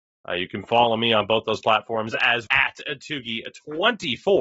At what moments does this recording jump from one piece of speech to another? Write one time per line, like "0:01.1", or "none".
0:02.5